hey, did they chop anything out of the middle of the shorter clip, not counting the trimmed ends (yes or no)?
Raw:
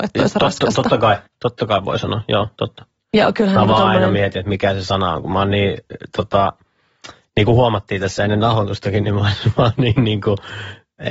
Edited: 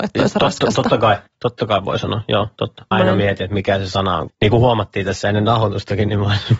yes